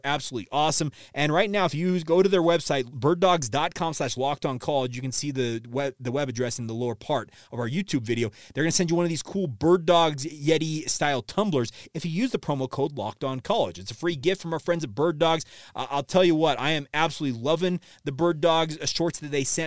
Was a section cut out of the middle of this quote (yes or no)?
no